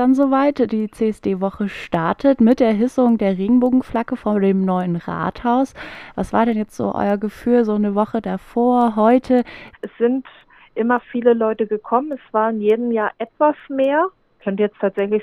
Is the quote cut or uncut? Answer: cut